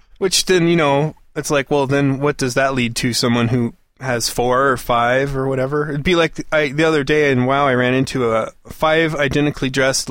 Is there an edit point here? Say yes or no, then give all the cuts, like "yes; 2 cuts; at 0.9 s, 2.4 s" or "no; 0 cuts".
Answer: no; 0 cuts